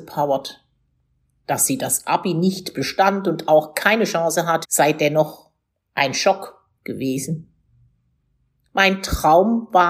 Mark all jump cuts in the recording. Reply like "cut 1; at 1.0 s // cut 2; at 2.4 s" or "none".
cut 1; at 4.6 s